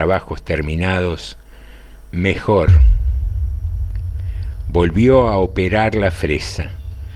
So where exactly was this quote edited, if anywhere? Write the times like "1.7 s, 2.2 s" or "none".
2.1 s

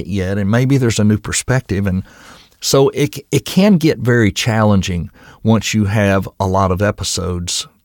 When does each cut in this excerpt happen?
none

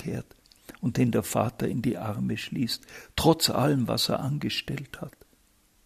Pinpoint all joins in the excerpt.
none

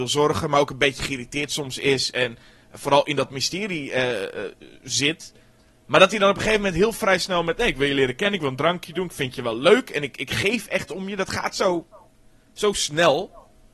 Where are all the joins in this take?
none

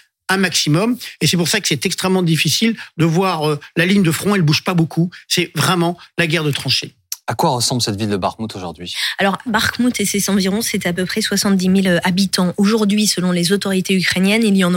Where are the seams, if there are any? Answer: 9.5 s

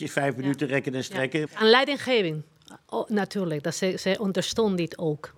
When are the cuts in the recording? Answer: 1.5 s

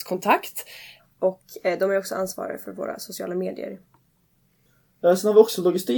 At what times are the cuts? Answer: 1.0 s

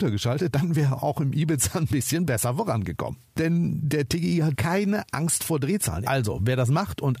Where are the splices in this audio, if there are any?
4.5 s, 6.0 s

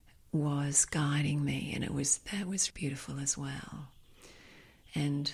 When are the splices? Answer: 2.7 s

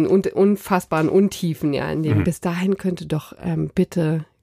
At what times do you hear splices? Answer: 2.2 s

